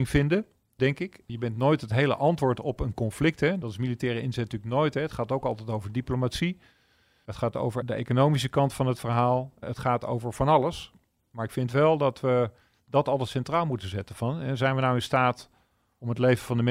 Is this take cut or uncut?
uncut